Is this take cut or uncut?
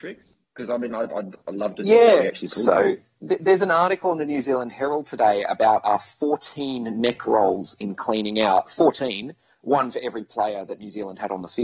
uncut